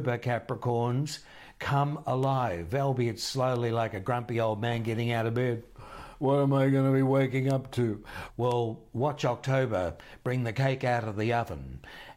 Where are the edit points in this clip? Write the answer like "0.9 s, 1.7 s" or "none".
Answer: 8.3 s